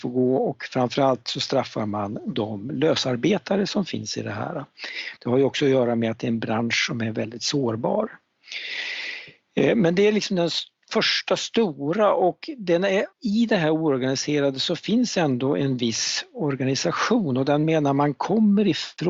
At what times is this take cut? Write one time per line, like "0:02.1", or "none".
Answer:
0:05.2
0:13.1